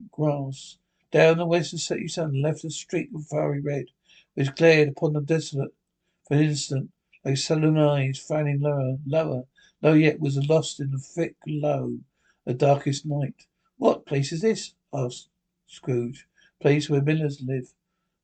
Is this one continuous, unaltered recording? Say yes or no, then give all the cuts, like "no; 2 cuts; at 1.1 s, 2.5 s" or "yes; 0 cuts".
yes; 0 cuts